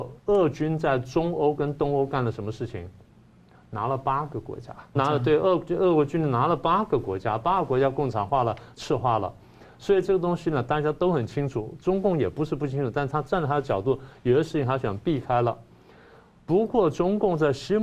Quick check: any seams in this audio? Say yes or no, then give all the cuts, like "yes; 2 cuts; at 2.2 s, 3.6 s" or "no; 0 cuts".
yes; 1 cut; at 4.9 s